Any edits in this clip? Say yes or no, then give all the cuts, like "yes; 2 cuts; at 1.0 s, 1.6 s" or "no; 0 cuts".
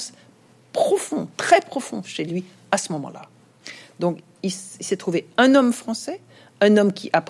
no; 0 cuts